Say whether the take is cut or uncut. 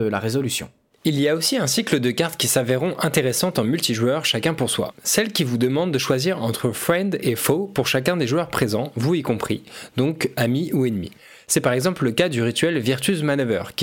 uncut